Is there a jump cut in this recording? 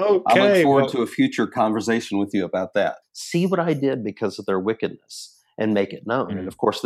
yes; 1 cut; at 3.0 s

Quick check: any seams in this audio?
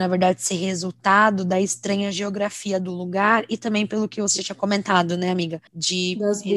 yes; 1 cut; at 5.7 s

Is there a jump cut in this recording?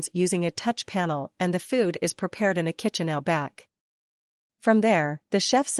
no; 0 cuts

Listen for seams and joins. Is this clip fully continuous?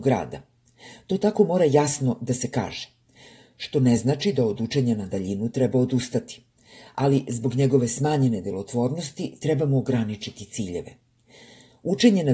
yes; 0 cuts

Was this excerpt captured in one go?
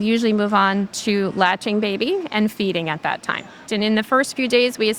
no; 1 cut; at 3.7 s

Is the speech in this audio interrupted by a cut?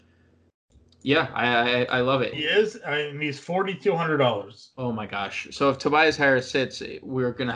yes; 1 cut; at 2.3 s

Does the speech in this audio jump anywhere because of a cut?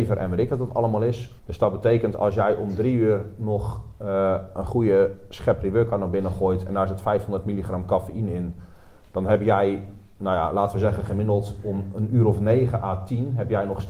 yes; 1 cut; at 1.4 s

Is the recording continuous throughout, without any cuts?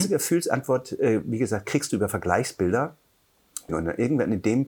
no; 1 cut; at 3.7 s

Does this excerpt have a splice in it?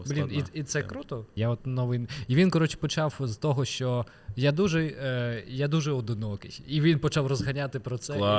yes; 1 cut; at 1.4 s

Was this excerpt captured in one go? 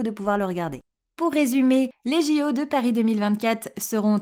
no; 1 cut; at 1.1 s

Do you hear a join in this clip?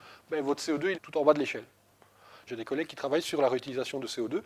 yes; 2 cuts; at 0.9 s, 2.5 s

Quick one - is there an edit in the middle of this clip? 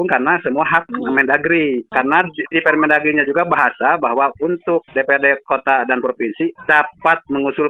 no; 0 cuts

